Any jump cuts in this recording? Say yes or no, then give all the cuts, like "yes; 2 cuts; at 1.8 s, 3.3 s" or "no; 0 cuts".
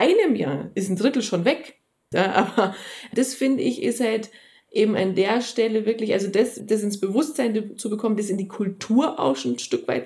yes; 2 cuts; at 2.1 s, 6.6 s